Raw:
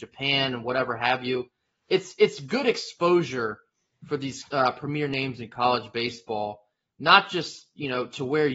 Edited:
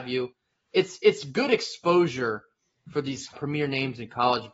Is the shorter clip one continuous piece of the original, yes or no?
no